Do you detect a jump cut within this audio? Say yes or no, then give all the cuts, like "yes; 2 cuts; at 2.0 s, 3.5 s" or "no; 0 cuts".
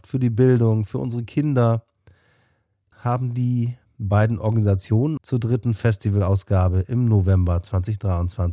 yes; 2 cuts; at 2.9 s, 5.2 s